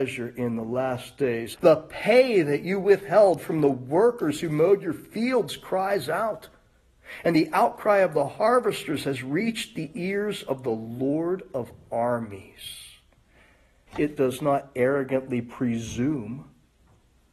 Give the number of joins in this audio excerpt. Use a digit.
2